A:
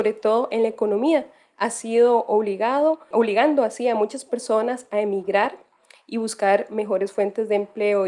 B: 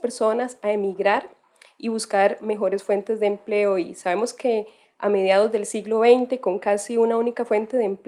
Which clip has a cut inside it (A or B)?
A